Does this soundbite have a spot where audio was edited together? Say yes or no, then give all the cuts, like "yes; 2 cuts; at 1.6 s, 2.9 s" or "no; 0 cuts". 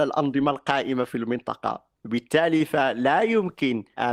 yes; 1 cut; at 2.0 s